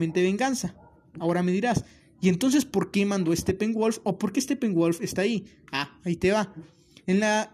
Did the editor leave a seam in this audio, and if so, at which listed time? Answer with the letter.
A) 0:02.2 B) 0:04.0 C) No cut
C